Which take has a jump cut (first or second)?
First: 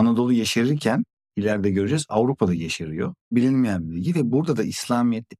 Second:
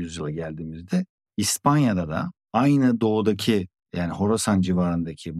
first